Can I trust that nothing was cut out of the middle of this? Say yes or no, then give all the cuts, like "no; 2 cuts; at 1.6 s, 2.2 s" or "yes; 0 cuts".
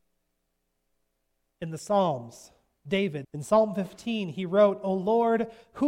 no; 1 cut; at 3.2 s